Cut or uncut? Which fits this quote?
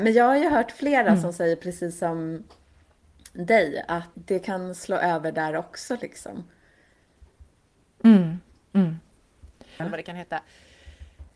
cut